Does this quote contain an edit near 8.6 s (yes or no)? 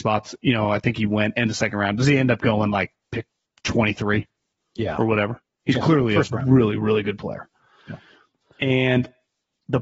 no